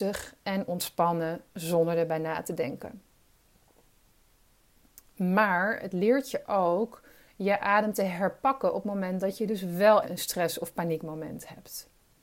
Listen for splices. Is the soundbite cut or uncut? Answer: cut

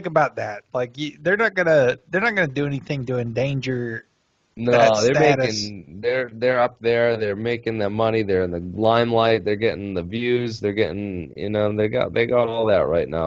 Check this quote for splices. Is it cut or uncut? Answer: uncut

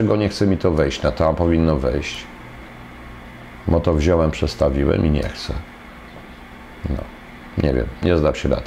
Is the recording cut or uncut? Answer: uncut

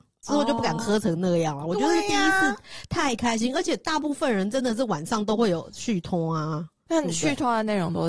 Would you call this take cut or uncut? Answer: uncut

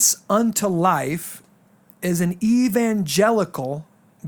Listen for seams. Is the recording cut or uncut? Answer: uncut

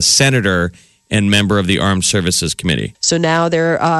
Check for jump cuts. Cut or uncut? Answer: cut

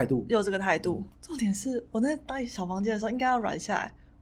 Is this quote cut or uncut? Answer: cut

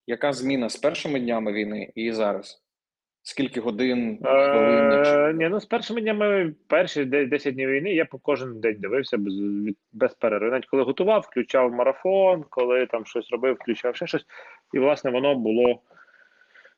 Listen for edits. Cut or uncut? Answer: uncut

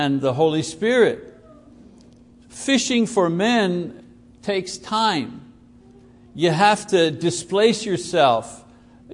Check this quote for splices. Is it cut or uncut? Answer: uncut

